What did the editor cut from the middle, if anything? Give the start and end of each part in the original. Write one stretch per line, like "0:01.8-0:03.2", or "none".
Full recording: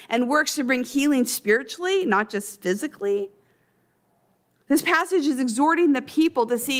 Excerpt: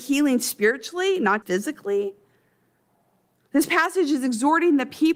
0:02.3-0:02.6